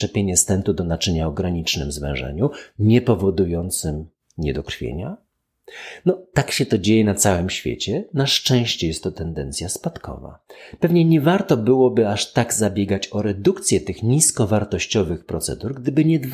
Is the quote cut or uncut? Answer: uncut